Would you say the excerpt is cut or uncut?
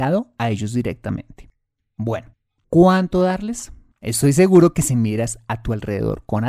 cut